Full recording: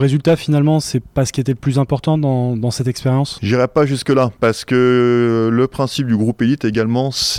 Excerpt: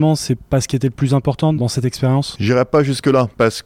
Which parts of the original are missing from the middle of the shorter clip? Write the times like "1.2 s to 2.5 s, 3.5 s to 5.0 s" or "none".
2.2 s to 2.6 s